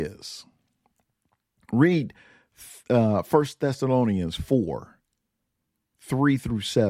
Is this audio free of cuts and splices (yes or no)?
yes